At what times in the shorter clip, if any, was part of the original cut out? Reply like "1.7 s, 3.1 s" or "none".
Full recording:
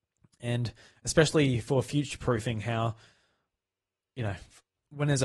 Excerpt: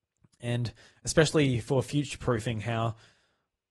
none

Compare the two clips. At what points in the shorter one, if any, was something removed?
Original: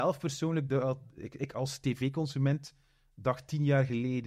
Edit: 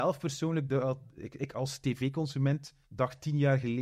2.8 s

